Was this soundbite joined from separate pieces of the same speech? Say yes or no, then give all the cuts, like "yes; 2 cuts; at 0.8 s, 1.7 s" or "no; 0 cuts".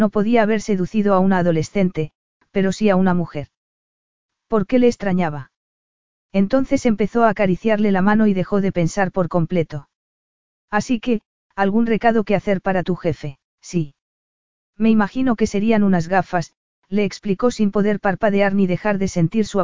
yes; 2 cuts; at 11.5 s, 13.5 s